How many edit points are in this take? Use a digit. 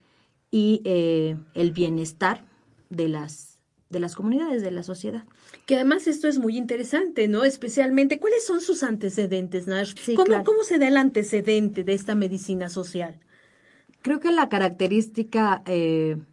1